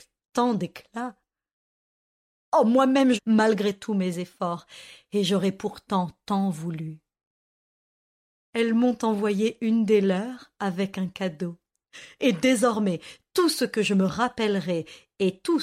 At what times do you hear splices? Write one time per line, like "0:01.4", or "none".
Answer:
0:03.2